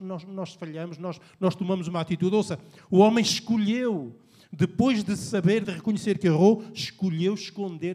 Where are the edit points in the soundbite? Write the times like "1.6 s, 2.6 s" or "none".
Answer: 5.6 s